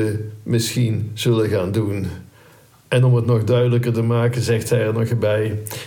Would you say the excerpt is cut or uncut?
uncut